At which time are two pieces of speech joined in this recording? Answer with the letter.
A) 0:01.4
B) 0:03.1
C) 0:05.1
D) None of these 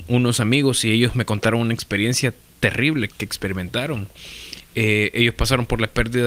B